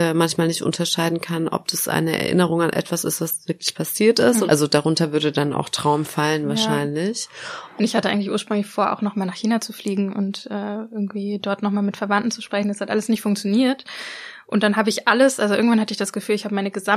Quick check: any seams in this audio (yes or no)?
yes